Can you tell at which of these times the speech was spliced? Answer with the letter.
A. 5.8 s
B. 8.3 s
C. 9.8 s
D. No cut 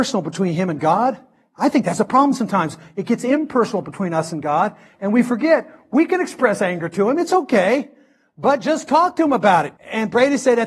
C